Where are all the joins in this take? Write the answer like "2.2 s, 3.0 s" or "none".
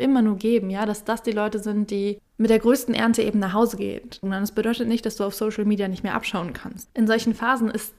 4.2 s, 6.8 s